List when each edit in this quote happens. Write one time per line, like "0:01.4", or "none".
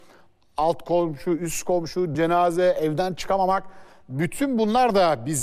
0:02.1